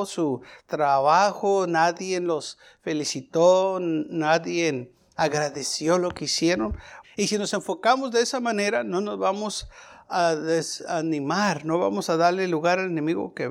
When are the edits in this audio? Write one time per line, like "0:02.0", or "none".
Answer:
0:07.0